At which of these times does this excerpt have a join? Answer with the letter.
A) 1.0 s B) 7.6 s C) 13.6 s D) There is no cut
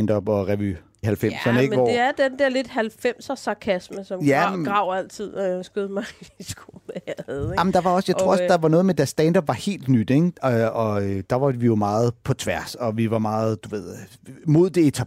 A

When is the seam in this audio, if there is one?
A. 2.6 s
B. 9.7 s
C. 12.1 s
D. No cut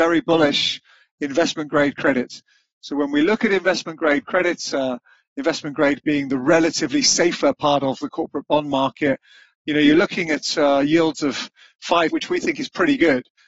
C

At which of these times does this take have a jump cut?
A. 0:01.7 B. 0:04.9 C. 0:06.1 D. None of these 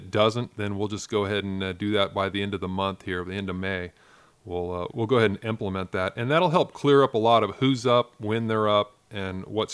B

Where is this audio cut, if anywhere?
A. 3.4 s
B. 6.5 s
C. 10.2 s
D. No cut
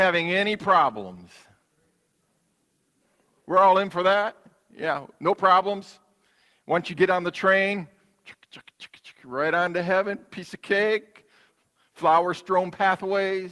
D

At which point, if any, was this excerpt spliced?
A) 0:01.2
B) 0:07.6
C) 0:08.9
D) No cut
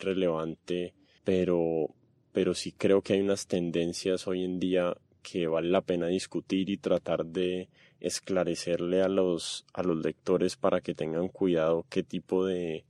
A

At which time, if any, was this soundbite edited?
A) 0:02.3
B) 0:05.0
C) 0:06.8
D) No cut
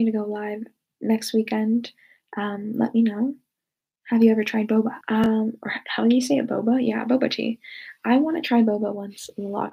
B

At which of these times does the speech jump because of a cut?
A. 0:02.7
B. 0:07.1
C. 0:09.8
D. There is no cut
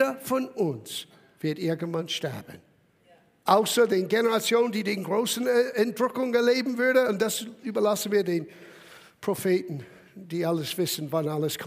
D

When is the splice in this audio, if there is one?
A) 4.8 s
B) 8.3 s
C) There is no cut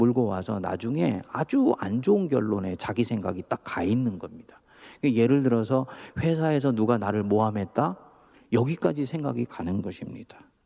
B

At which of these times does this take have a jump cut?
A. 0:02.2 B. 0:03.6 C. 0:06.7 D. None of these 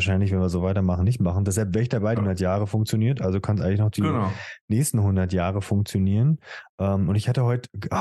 A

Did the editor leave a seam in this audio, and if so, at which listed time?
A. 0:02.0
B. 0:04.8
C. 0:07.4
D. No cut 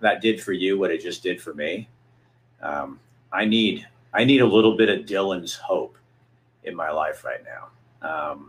D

